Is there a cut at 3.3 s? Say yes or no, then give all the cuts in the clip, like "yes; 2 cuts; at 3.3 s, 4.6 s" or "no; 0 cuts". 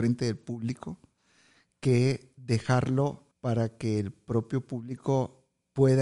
yes; 1 cut; at 3.3 s